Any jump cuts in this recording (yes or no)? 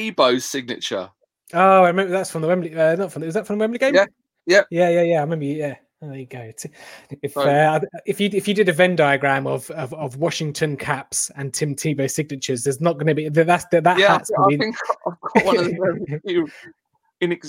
no